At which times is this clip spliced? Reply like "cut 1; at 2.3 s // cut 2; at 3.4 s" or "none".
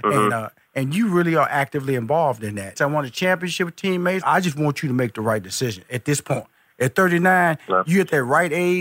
cut 1; at 2.8 s // cut 2; at 4.2 s